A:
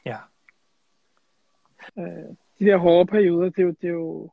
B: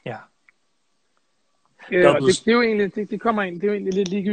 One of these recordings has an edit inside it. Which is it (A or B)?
A